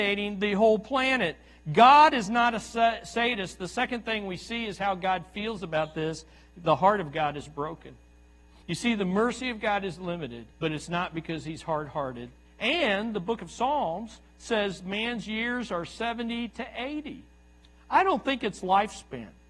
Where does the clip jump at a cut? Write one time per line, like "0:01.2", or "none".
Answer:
0:08.6
0:10.5
0:12.5